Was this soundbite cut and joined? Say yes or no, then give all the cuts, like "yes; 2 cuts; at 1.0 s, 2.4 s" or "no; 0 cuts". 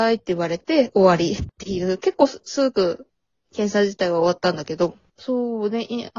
yes; 1 cut; at 5.1 s